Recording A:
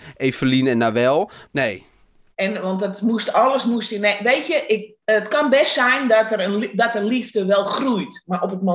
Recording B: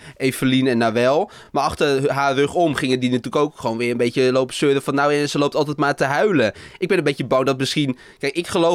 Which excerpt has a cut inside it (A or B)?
A